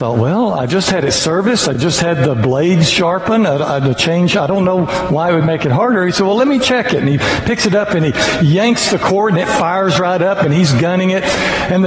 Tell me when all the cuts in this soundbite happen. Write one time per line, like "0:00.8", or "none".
none